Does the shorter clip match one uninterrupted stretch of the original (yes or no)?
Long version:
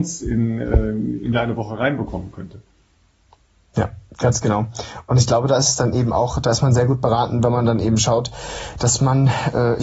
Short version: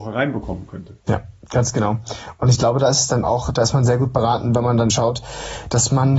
no